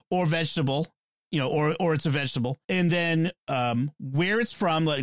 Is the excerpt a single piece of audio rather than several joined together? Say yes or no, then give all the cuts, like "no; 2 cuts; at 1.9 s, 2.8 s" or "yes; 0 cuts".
no; 1 cut; at 2.6 s